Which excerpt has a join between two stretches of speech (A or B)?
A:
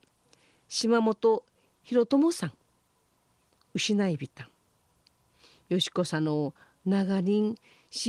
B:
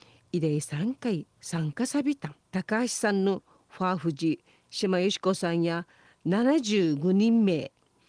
B